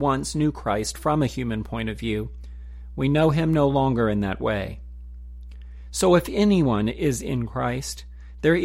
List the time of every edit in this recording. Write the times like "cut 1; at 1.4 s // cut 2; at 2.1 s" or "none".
none